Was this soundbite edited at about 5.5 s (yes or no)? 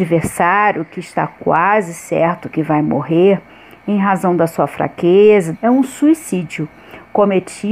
yes